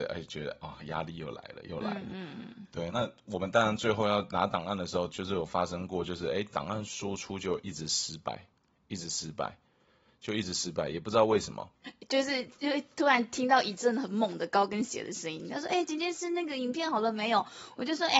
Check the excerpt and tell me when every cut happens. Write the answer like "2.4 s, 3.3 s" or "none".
2.9 s, 11.8 s

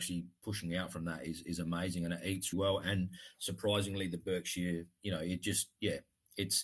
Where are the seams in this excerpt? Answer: 2.5 s

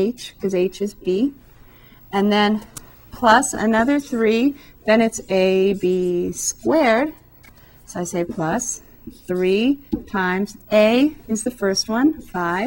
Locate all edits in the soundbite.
none

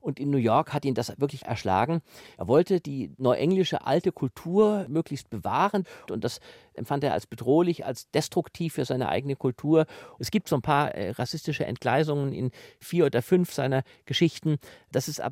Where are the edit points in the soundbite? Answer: 6.1 s

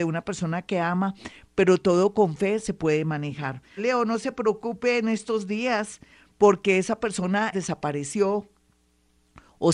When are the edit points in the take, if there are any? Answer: 3.8 s, 7.5 s

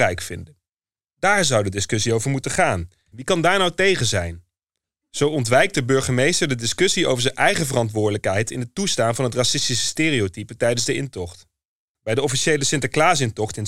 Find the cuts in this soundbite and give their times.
3.1 s, 11.9 s

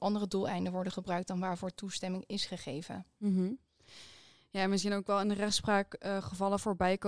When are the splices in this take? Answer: none

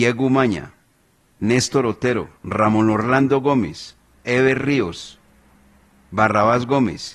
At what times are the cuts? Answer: 2.4 s, 4.2 s

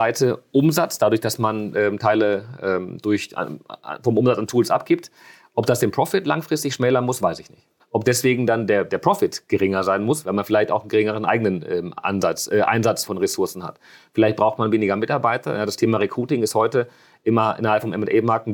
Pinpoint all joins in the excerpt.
7.8 s, 10.2 s, 13.1 s

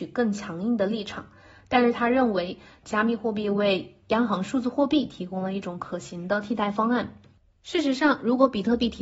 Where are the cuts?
2.8 s

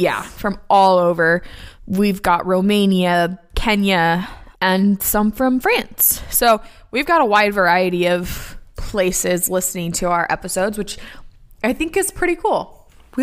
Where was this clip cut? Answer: 3.5 s

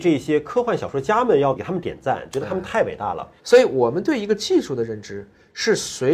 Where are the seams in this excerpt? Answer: 1.6 s, 3.4 s

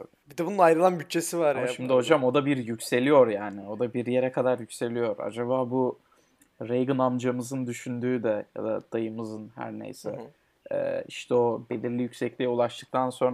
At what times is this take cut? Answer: none

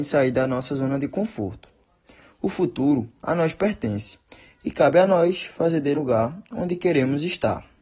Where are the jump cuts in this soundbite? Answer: 6.0 s

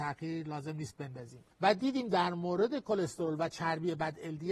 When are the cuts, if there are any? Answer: 1.5 s

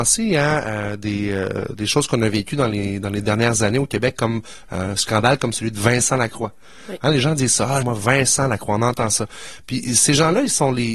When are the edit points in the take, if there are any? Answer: 7.8 s, 9.6 s

